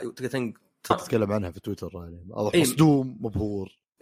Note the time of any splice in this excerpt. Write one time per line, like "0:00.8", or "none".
0:00.9